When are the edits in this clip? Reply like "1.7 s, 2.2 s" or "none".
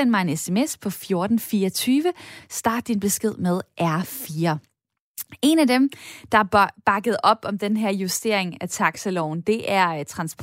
none